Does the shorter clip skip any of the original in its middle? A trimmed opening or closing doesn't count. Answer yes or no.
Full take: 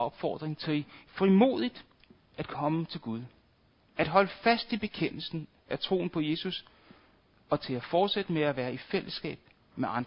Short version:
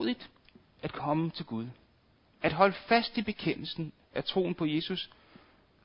no